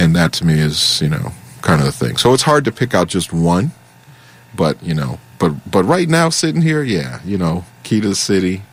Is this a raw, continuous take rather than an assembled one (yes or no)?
yes